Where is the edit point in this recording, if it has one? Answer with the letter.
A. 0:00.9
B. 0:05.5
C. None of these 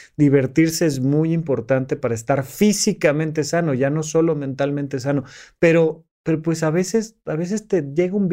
C